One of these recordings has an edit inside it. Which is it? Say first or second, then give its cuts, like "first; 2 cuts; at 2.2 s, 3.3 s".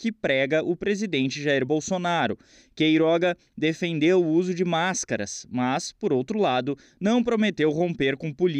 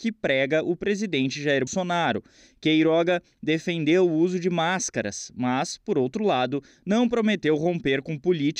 second; 1 cut; at 1.7 s